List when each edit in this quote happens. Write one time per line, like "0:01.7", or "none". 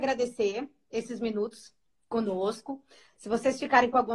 none